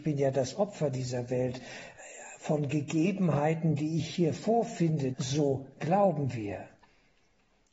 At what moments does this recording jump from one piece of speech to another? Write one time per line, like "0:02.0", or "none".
0:05.1